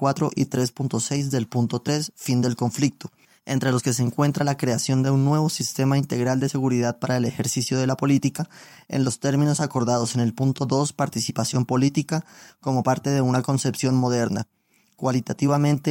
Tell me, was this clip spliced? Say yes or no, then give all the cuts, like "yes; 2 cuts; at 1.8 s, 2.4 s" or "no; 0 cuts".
no; 0 cuts